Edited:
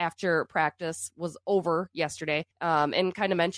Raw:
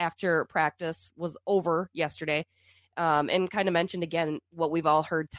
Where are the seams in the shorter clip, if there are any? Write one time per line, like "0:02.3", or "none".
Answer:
0:02.5